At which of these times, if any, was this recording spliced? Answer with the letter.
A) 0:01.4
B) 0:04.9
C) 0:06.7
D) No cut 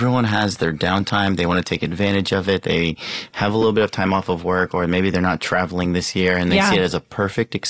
D